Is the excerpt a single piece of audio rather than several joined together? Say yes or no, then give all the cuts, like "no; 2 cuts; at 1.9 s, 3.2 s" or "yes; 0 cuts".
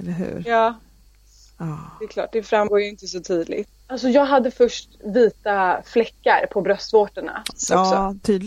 no; 2 cuts; at 3.7 s, 7.5 s